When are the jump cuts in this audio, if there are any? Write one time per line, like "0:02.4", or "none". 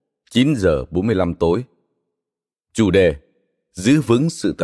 0:02.5